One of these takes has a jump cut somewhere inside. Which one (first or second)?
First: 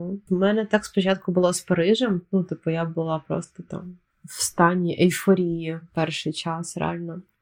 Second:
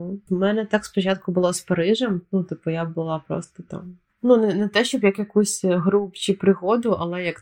second